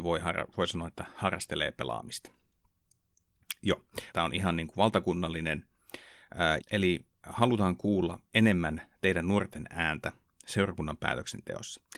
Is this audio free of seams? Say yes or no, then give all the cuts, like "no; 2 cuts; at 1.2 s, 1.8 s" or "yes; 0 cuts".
no; 2 cuts; at 4.1 s, 6.6 s